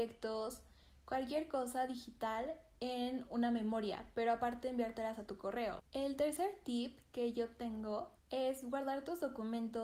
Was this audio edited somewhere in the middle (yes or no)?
yes